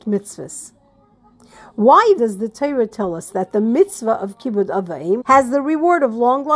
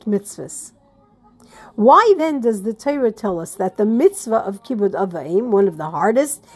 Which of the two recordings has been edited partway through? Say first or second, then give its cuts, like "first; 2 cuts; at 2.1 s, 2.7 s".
first; 2 cuts; at 2.2 s, 5.2 s